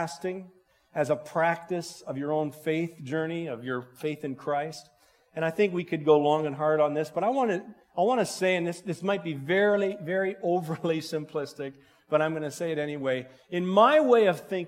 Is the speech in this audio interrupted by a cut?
no; 0 cuts

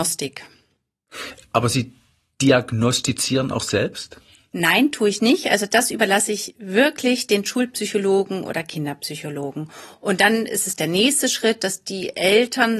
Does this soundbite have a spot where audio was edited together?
no; 0 cuts

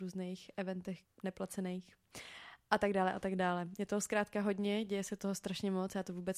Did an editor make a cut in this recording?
yes; 1 cut; at 1.0 s

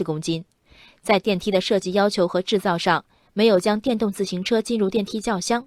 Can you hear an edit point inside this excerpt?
no; 0 cuts

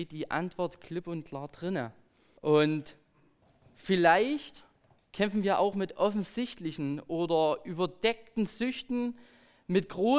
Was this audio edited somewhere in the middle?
yes; 1 cut; at 2.4 s

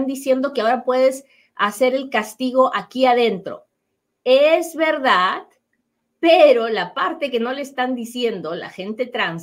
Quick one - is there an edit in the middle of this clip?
no; 0 cuts

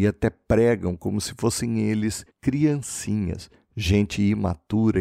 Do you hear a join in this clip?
no; 0 cuts

